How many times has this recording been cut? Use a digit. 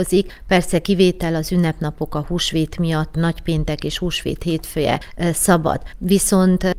0